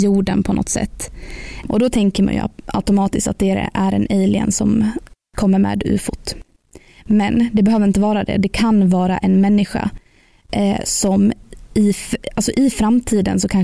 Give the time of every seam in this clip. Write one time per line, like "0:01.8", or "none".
0:01.6